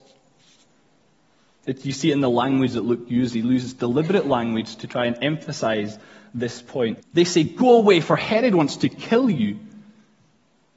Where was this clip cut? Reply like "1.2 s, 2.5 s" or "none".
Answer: 7.0 s